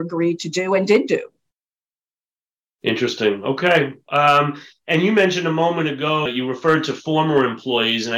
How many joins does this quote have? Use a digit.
1